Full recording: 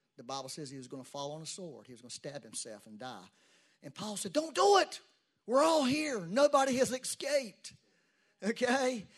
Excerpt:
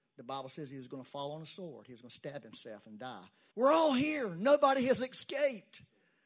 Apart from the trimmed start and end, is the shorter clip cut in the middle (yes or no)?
yes